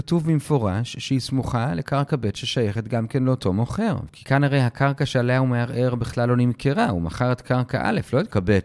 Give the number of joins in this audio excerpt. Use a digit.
1